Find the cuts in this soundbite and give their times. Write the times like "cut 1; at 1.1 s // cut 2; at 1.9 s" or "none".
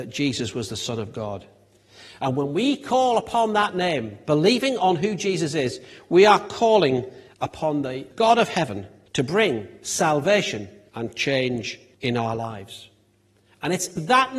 cut 1; at 10.9 s